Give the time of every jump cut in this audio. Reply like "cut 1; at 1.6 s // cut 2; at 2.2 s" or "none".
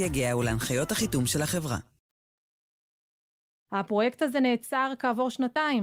cut 1; at 3.7 s